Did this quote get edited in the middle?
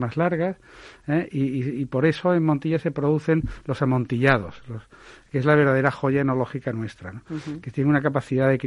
no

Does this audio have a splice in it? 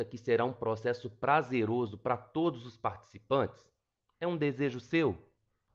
no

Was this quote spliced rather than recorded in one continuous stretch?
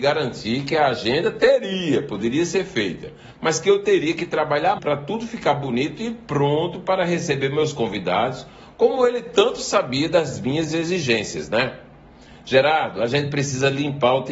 yes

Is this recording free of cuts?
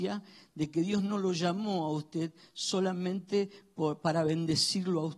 yes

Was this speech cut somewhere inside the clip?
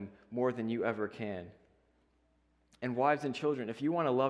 no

